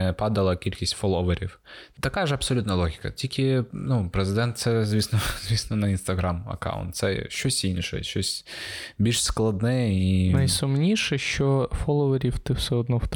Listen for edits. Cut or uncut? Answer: cut